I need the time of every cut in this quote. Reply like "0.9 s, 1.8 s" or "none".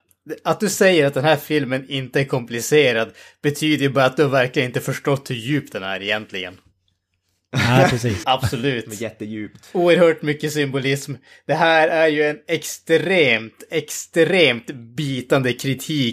8.2 s

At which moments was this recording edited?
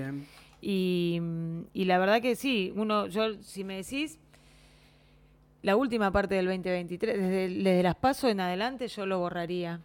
none

